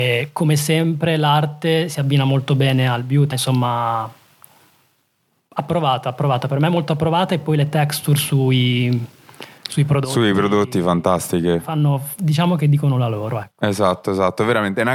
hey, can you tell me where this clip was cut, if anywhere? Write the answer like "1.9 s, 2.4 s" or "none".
3.3 s